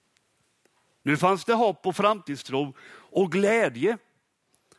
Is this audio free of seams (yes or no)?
no